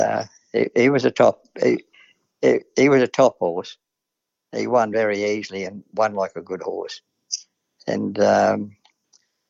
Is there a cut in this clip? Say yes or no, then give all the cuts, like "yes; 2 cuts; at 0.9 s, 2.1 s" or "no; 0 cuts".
no; 0 cuts